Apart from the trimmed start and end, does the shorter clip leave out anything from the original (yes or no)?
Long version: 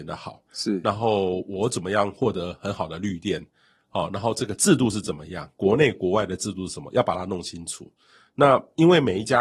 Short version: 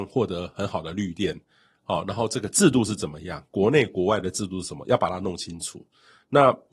no